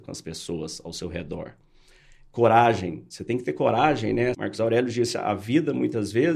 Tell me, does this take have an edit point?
yes; 1 cut; at 4.3 s

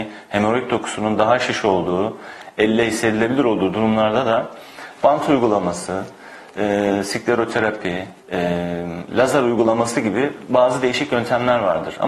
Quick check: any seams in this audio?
yes; 1 cut; at 8.2 s

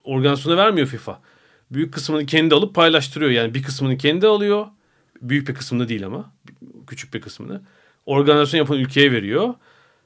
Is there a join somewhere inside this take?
no; 0 cuts

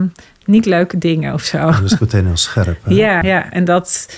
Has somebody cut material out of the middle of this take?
yes; 1 cut; at 3.2 s

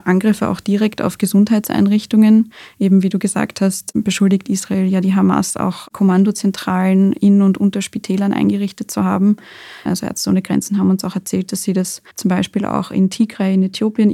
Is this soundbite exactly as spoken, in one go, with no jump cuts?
no; 2 cuts; at 9.9 s, 12.1 s

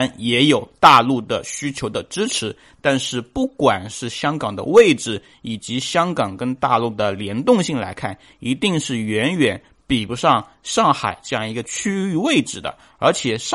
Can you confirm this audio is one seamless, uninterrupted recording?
yes; 0 cuts

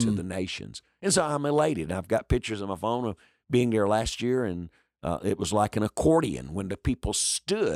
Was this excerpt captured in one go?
yes; 0 cuts

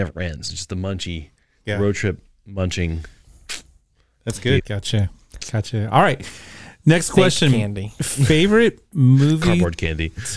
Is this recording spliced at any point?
yes; 1 cut; at 4.6 s

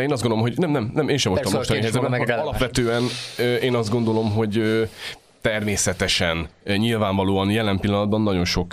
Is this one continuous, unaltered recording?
yes; 0 cuts

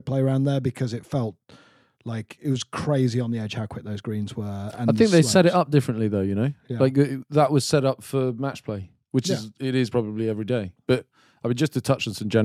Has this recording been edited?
no; 0 cuts

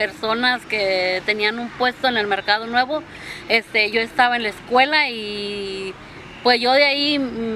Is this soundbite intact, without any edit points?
no; 1 cut; at 3.9 s

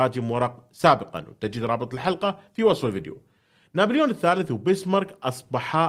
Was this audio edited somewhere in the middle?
no; 0 cuts

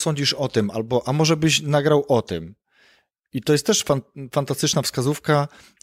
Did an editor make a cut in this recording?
no; 0 cuts

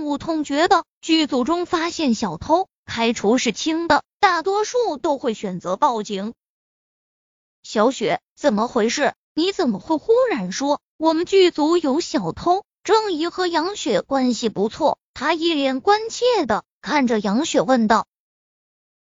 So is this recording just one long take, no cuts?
yes; 0 cuts

